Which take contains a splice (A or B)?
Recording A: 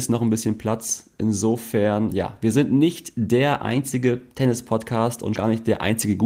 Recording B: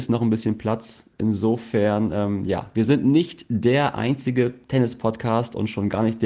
A